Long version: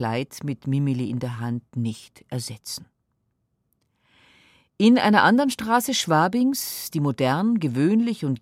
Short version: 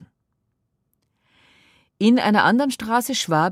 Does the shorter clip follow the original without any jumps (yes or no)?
yes